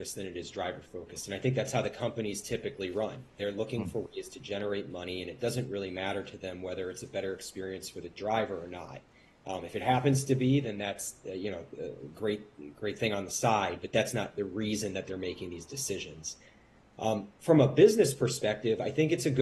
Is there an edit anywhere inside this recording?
no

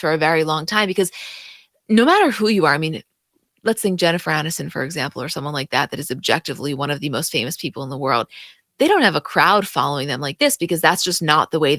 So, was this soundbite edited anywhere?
no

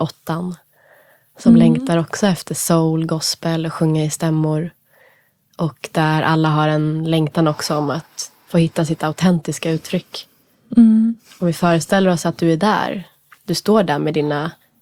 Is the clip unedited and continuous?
yes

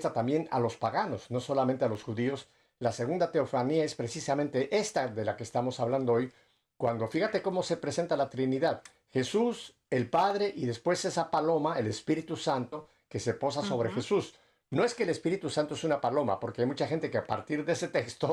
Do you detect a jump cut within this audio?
no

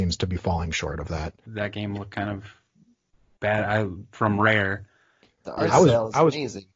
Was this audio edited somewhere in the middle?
yes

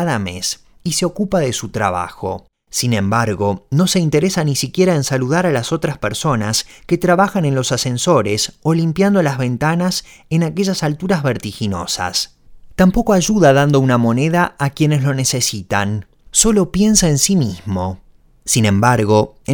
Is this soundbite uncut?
yes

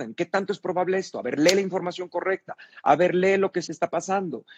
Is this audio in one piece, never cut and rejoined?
no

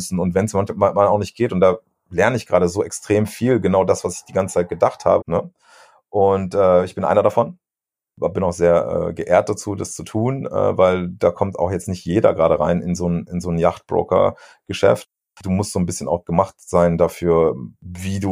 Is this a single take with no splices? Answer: no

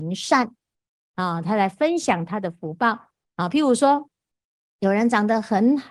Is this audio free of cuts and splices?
yes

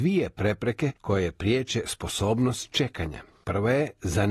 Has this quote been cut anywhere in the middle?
no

